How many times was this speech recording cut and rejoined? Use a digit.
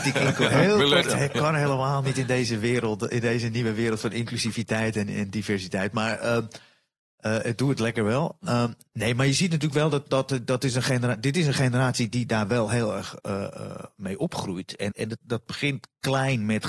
2